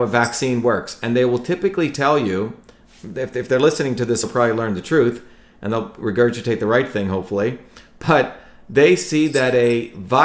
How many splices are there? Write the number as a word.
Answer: zero